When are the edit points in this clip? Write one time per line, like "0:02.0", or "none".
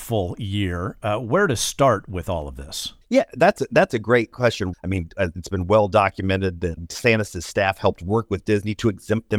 0:03.0
0:04.7
0:06.8